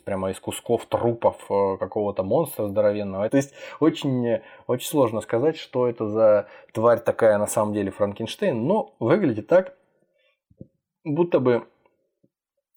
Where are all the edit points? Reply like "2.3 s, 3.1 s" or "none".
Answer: 3.3 s